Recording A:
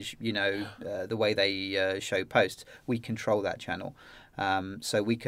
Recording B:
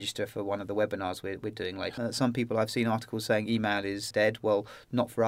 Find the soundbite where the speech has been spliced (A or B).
B